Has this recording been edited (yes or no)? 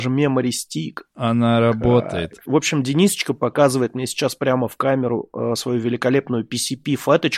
yes